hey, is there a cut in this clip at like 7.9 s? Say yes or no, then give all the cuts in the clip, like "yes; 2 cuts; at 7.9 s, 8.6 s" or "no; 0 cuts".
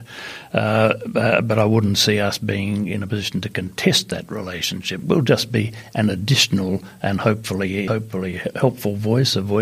yes; 1 cut; at 7.9 s